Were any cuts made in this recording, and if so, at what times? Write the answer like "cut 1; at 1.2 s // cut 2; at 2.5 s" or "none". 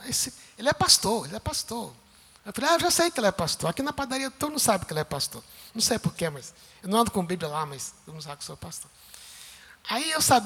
none

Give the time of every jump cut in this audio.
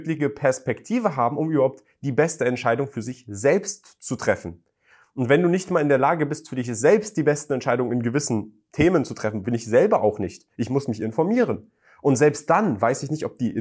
cut 1; at 9.4 s

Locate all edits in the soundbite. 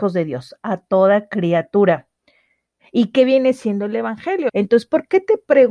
cut 1; at 2.8 s // cut 2; at 4.5 s

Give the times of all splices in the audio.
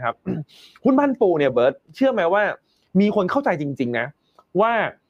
none

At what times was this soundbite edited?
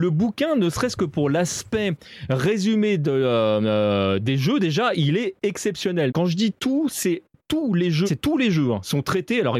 cut 1; at 6.1 s // cut 2; at 8.1 s

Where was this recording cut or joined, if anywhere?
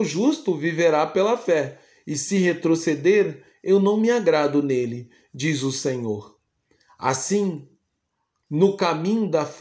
none

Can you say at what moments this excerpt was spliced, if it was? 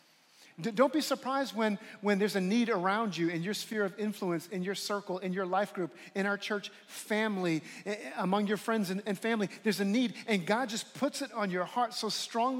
none

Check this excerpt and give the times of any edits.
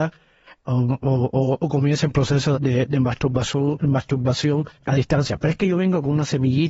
cut 1; at 2.6 s // cut 2; at 4.8 s

